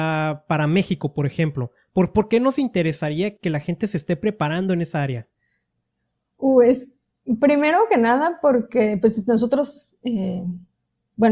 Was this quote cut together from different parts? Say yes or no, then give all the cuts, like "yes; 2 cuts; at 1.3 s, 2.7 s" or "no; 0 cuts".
yes; 1 cut; at 3.4 s